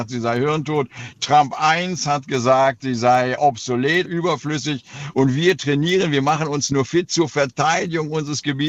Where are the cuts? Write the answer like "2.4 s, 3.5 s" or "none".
4.0 s, 5.1 s

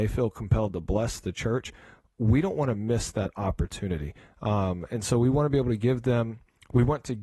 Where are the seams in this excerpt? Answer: none

